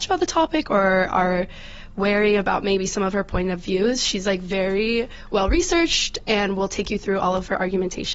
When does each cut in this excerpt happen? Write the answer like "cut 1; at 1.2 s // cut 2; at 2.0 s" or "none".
none